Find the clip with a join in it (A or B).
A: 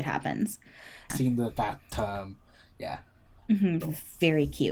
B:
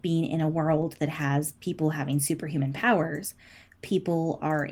A